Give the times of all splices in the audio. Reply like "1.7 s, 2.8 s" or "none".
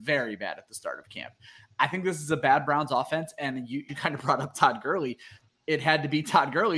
3.9 s, 5.5 s